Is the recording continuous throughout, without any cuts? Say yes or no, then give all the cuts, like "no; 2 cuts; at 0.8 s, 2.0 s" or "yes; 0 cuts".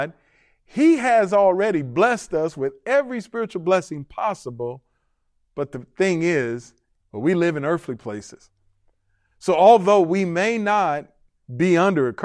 no; 1 cut; at 7.0 s